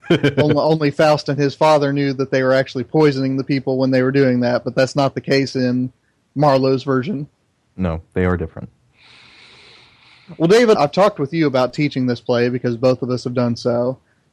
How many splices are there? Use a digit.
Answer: 1